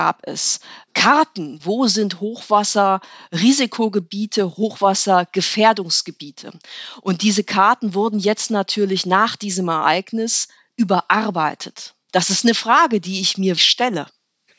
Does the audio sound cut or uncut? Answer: cut